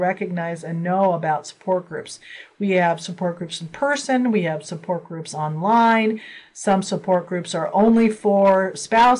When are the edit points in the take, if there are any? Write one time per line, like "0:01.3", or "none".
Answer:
none